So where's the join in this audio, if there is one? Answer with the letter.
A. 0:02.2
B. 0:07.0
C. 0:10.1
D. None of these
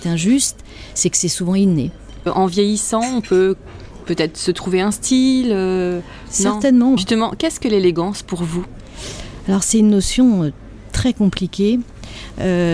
B